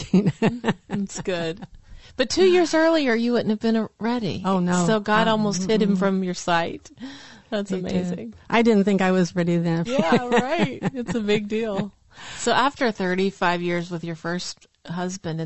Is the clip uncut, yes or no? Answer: no